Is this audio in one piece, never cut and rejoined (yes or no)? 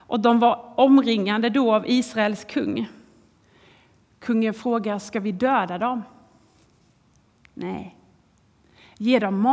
yes